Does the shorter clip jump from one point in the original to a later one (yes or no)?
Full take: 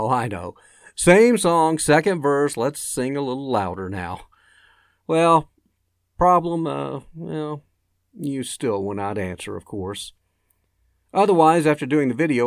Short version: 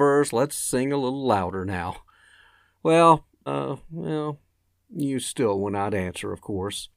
yes